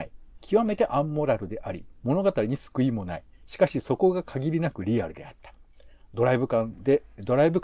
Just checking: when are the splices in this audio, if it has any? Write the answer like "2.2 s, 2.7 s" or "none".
none